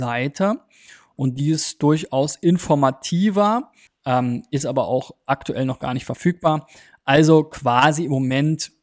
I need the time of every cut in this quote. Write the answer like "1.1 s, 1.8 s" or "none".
3.9 s